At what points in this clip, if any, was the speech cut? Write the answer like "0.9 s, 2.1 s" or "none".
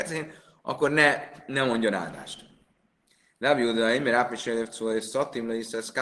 none